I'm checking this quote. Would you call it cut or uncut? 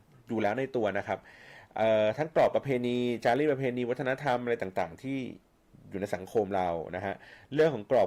uncut